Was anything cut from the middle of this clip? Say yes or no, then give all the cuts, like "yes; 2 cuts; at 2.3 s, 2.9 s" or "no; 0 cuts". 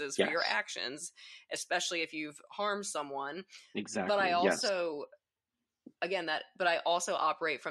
no; 0 cuts